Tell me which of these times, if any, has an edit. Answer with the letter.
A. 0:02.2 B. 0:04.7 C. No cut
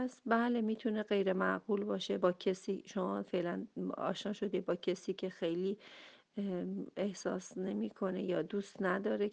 A